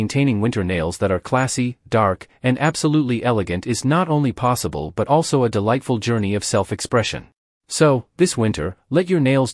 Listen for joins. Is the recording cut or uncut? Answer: uncut